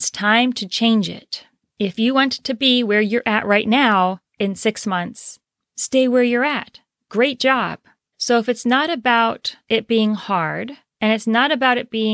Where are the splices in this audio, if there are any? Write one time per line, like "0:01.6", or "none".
0:05.6
0:08.1